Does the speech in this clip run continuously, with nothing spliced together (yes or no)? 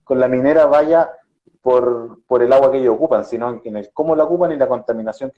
yes